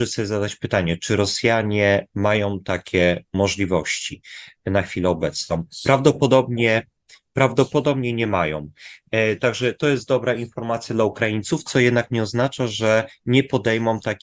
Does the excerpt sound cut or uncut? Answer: uncut